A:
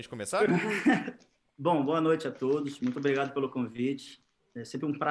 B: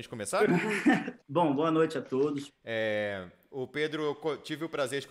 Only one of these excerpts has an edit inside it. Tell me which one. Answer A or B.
B